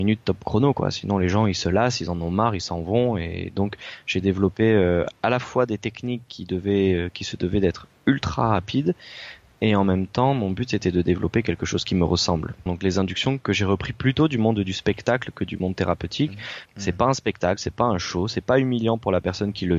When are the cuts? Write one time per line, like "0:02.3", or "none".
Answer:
0:12.7
0:16.7